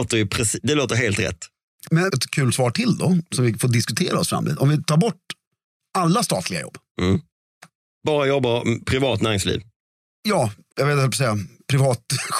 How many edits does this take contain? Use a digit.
2